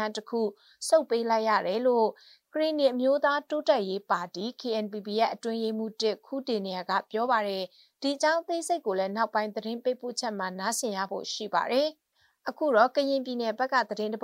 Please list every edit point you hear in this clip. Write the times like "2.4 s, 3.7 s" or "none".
none